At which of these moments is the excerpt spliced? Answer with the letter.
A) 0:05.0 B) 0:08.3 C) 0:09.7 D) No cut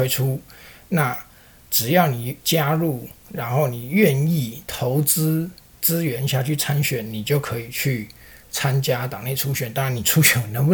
D